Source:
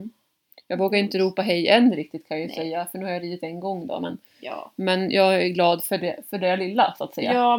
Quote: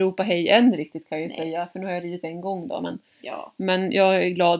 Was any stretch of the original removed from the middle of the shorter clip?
no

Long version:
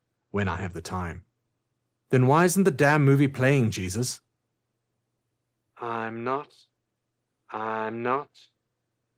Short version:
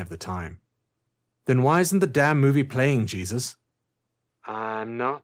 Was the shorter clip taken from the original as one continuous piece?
no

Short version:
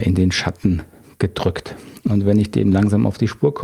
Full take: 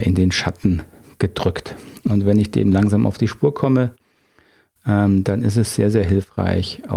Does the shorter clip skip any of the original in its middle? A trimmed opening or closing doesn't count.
no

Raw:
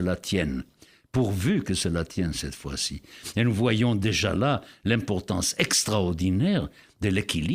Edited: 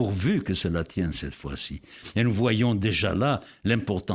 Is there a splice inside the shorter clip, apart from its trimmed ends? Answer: no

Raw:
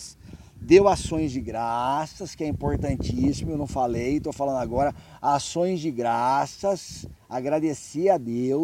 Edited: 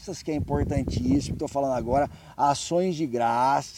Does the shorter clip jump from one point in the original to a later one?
yes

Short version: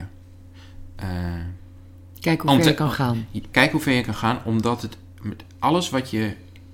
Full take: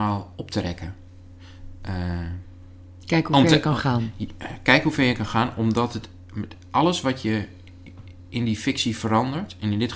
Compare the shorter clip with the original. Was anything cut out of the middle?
yes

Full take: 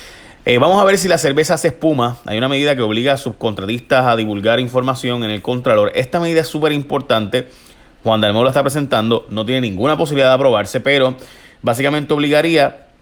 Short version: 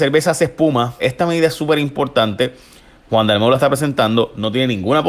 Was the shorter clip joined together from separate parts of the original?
yes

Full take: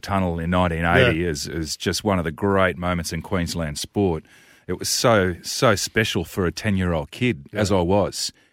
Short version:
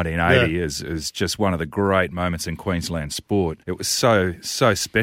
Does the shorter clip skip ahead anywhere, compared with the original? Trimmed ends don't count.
yes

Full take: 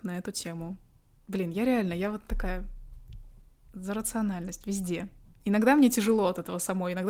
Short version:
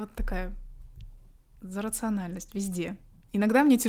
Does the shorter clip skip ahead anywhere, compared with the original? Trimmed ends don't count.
no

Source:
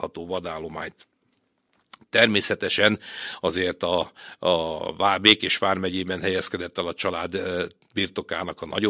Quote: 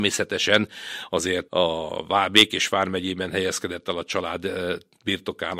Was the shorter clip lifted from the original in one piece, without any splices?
no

